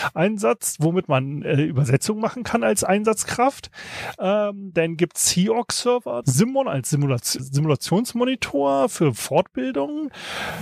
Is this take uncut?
no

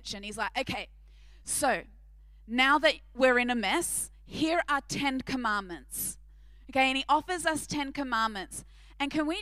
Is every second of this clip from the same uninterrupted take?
yes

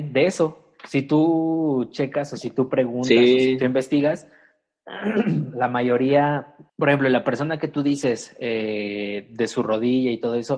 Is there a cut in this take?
yes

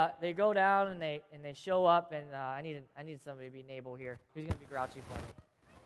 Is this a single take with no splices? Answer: no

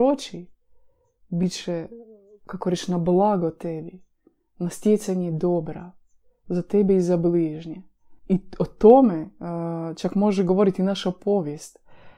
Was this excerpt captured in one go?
no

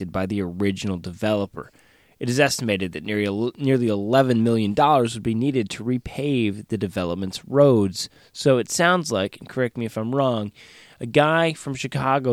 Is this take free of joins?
yes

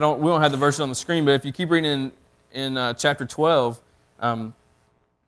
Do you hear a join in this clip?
no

